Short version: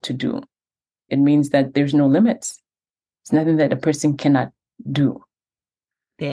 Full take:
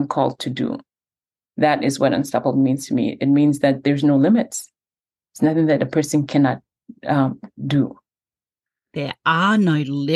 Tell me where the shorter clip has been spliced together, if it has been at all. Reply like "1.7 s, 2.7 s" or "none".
1.1 s, 4.8 s